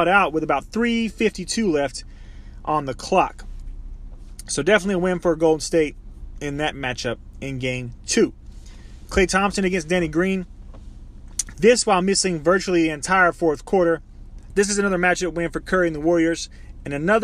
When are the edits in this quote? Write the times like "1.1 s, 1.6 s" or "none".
11.5 s, 14.5 s